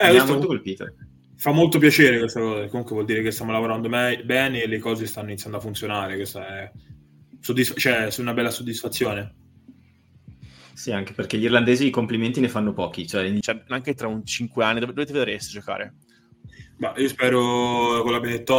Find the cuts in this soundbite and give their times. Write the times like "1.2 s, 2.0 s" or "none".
13.4 s